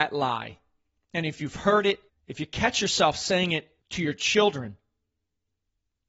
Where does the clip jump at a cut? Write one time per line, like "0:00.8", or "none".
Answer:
0:02.1
0:03.8